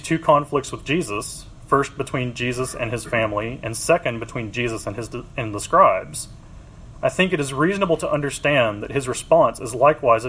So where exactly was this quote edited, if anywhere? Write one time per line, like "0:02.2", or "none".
0:06.9